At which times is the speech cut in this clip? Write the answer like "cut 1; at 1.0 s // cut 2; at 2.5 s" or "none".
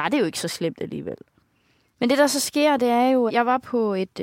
cut 1; at 1.9 s // cut 2; at 3.3 s